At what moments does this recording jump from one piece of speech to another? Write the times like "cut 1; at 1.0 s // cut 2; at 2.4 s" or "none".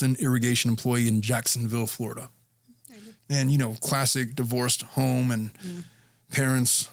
cut 1; at 3.2 s